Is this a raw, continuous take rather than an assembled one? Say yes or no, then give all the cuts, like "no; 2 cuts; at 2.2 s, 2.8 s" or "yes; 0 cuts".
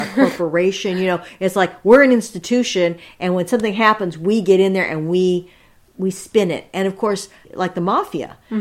yes; 0 cuts